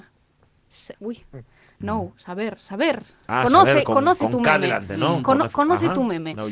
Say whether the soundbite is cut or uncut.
cut